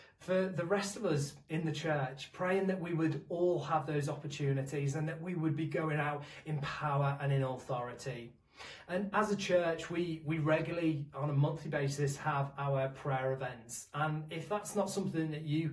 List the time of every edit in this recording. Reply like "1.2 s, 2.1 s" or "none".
none